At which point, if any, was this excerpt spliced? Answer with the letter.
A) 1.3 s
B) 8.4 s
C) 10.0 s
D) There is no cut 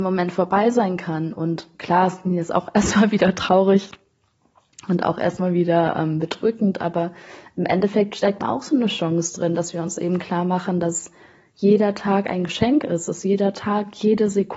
B